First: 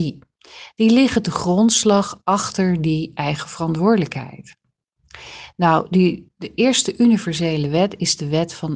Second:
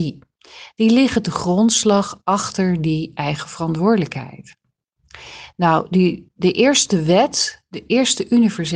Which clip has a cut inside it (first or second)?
first